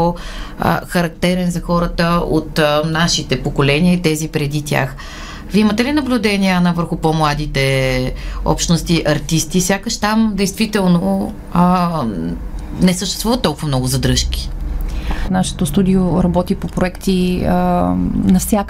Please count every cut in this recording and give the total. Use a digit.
1